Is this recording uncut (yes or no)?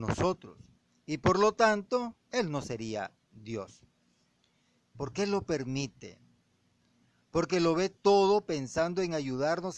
no